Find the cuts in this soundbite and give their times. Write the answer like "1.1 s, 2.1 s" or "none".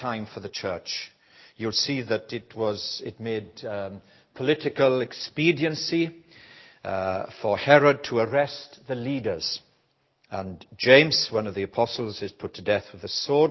none